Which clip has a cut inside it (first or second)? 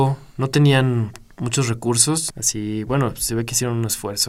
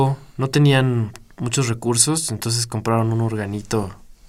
first